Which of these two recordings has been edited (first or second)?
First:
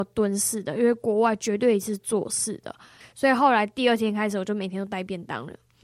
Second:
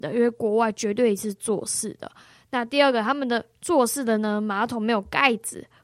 first